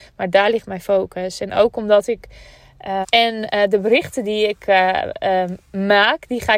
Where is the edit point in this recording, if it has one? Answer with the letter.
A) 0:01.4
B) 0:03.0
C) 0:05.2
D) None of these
B